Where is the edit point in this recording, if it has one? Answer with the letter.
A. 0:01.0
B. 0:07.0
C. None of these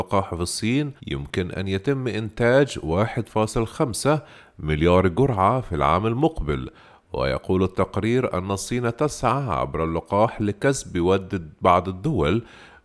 A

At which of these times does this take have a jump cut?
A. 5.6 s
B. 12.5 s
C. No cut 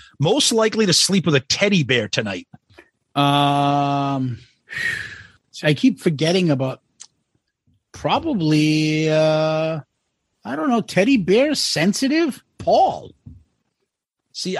A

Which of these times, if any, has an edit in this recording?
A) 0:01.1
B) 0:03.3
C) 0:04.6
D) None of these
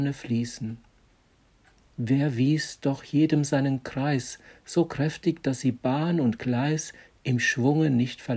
D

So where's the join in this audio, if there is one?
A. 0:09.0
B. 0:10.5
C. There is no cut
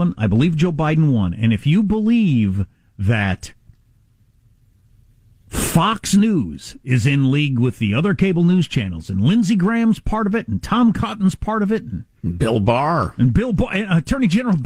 C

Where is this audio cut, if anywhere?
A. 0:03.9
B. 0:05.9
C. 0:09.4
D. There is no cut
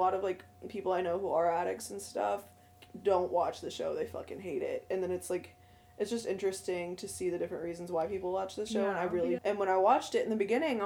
C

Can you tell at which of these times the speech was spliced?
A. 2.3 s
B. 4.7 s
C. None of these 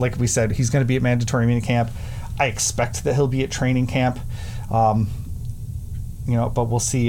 C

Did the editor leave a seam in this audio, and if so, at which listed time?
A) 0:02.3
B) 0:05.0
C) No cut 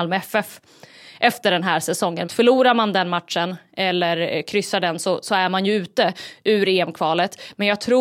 A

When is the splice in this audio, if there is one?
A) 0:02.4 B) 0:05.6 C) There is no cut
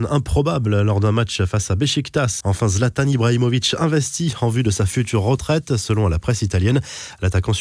A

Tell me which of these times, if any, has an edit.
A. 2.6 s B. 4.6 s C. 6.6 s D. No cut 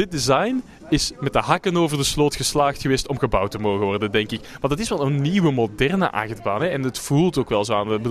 D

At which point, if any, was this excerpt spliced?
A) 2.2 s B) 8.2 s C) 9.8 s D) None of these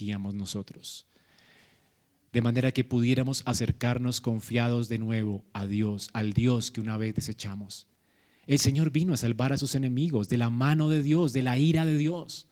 A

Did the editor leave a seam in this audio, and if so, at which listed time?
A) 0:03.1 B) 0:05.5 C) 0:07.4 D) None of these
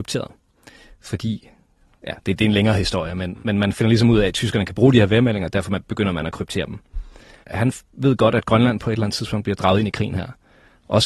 C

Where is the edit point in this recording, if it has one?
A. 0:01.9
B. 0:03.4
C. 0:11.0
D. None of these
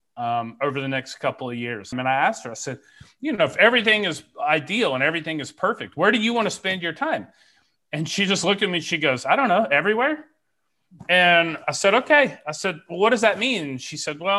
A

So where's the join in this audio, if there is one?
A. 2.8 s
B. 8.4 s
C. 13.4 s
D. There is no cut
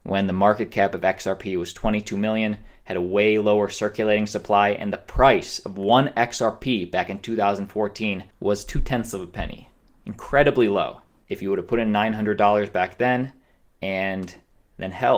D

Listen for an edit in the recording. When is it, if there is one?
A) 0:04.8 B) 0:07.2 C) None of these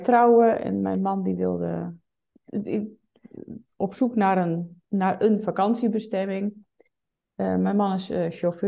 A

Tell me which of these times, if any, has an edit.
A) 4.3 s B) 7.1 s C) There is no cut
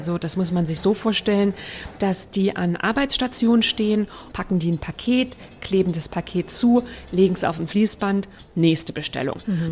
A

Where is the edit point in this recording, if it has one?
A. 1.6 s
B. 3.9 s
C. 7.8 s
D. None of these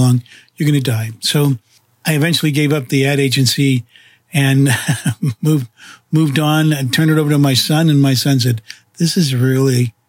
D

